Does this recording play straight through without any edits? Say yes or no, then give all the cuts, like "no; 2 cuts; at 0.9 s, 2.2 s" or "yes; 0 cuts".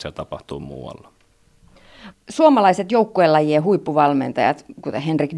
no; 1 cut; at 2.1 s